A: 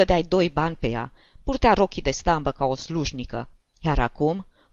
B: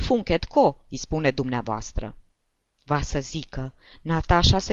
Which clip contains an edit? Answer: B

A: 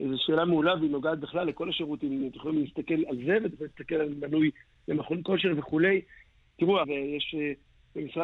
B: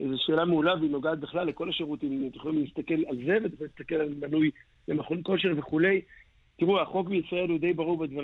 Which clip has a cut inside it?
A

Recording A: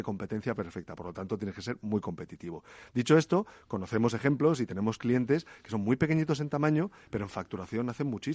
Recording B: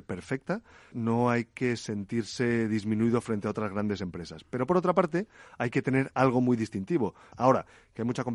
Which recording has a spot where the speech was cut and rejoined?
B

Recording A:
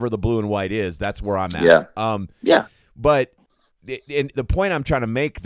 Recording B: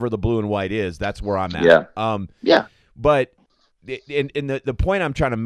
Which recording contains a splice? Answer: A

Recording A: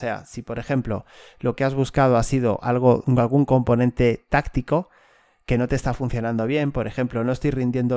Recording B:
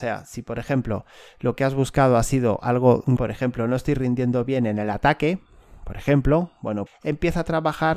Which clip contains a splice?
B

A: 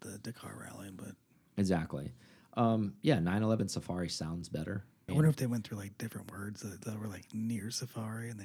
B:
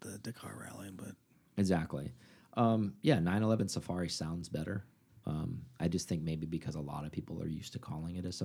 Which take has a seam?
A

